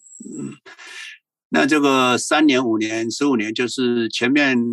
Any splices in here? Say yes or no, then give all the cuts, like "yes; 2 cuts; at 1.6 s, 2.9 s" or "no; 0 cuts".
no; 0 cuts